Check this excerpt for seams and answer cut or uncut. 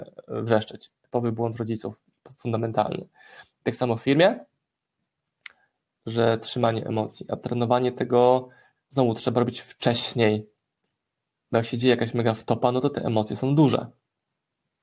uncut